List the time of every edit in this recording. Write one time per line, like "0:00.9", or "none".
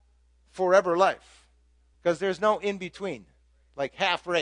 0:01.9